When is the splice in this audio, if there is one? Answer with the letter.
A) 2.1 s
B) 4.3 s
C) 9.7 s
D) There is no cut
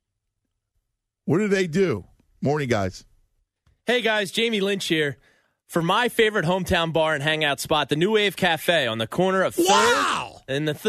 D